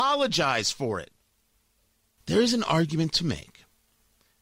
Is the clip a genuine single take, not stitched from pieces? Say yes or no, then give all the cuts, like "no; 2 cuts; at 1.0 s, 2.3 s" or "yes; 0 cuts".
no; 1 cut; at 2.2 s